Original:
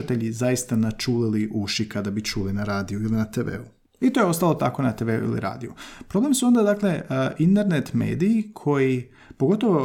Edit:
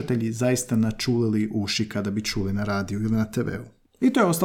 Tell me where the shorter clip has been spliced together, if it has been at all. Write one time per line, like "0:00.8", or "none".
none